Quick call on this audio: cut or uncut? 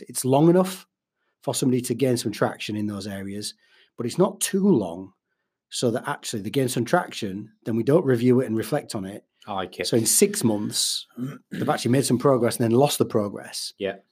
cut